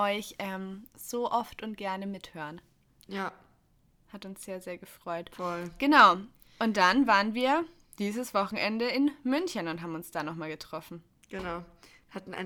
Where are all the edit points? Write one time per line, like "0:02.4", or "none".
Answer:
none